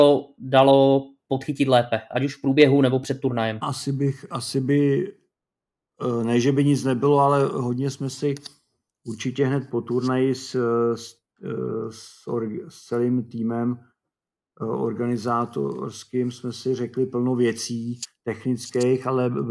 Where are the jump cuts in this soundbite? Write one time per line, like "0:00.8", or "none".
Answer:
0:03.6